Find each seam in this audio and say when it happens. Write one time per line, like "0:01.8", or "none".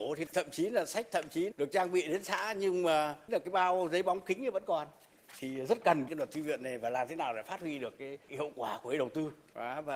0:01.5